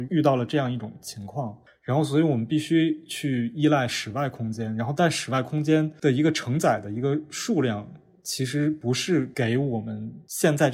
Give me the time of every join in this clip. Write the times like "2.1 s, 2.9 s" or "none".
1.7 s